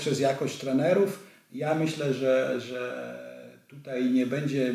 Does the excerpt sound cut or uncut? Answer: uncut